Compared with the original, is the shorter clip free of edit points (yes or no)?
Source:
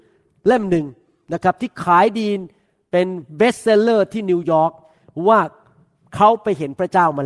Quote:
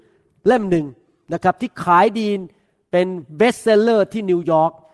yes